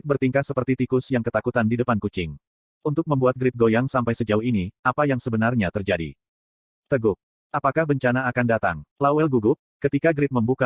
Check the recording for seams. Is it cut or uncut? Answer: uncut